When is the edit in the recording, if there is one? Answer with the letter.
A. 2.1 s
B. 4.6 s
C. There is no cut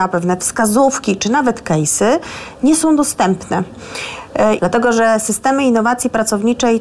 B